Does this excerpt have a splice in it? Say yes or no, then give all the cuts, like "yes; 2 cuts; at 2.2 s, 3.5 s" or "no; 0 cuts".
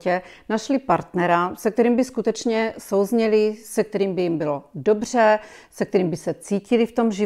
no; 0 cuts